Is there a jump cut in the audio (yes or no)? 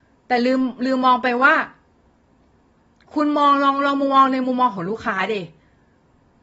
no